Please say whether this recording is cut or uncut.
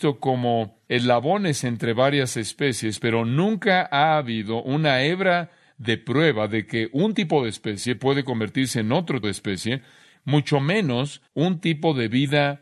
cut